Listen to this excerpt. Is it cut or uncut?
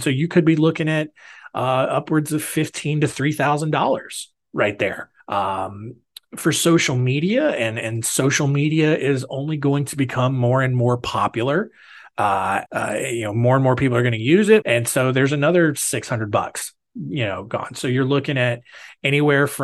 cut